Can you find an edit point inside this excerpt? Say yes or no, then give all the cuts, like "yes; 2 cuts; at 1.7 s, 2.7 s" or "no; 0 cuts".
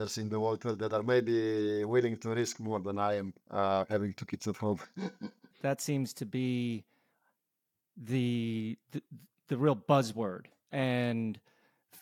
yes; 1 cut; at 5.5 s